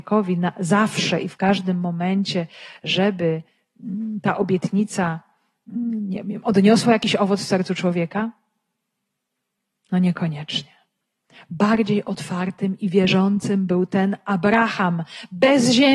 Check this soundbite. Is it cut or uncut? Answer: uncut